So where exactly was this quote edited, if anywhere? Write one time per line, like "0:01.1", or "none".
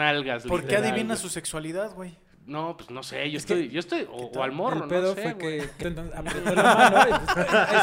0:05.8